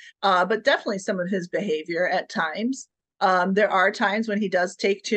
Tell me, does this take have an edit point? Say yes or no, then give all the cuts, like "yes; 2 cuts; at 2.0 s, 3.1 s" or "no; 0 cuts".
no; 0 cuts